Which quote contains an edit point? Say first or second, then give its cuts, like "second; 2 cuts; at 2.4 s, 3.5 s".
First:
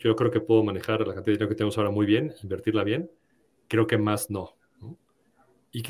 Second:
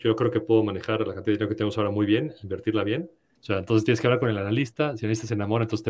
second; 1 cut; at 3.4 s